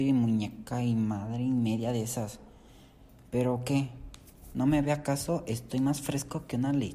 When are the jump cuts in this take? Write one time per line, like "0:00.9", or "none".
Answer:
none